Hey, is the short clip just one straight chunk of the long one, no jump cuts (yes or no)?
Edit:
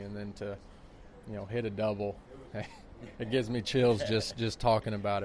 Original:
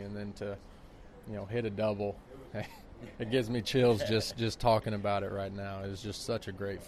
yes